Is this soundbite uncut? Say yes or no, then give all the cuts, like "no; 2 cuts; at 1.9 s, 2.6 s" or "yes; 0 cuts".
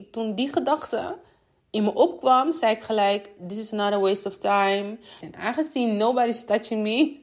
no; 1 cut; at 5.2 s